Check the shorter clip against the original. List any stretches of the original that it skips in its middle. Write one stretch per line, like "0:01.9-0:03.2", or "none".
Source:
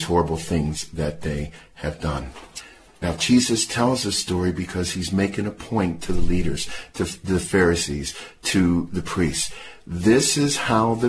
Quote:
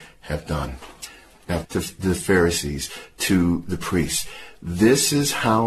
0:03.2-0:06.9